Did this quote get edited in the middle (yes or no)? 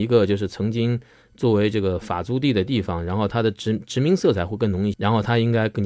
yes